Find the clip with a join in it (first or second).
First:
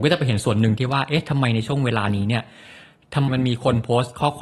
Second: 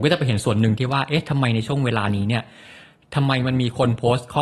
first